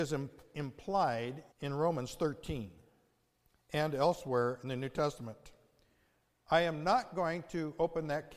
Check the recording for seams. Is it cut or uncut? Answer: cut